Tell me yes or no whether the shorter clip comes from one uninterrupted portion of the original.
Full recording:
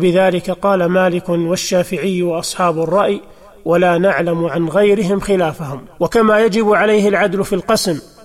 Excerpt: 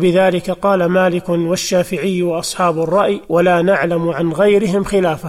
no